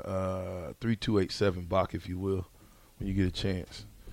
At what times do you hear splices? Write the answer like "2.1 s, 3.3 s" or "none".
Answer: none